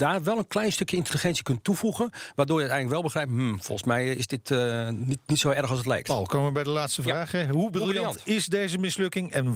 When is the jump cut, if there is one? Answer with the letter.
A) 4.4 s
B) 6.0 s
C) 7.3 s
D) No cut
D